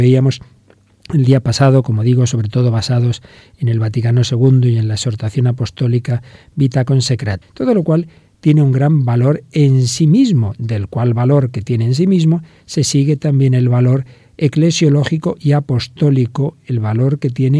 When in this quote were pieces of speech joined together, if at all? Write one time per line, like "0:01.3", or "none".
0:07.4

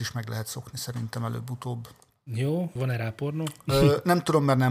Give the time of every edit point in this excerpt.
0:02.8

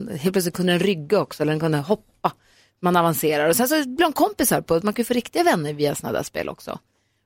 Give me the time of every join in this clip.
0:04.8

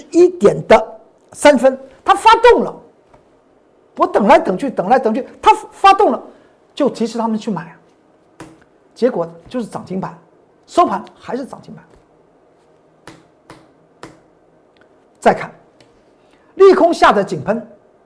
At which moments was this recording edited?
none

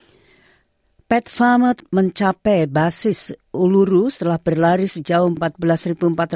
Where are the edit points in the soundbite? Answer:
none

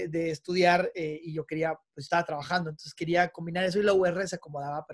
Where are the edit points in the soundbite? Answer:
none

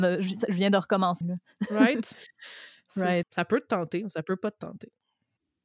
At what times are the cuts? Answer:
0:01.2
0:03.2

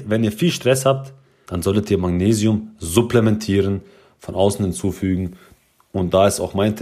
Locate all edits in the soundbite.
0:01.4

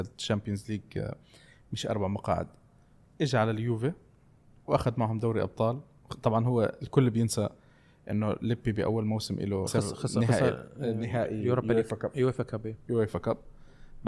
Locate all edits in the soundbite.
0:09.7

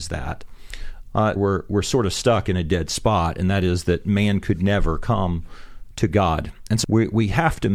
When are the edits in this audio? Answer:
0:01.4
0:06.8

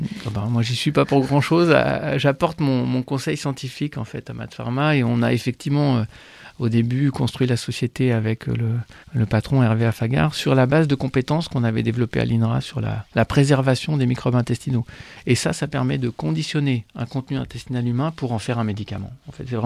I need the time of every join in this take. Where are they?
0:09.0

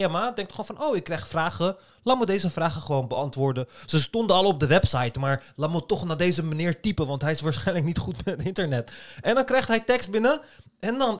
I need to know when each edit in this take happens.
none

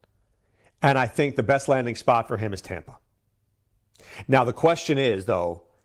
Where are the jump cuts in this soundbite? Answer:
none

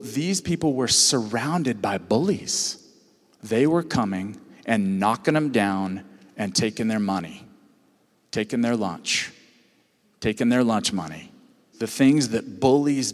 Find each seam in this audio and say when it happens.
0:11.7

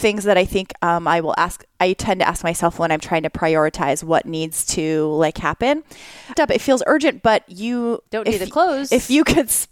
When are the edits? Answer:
0:06.4
0:08.0

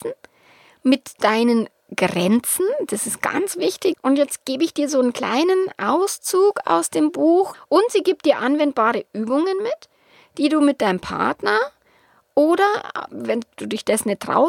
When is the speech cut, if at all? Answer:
0:03.9
0:07.5

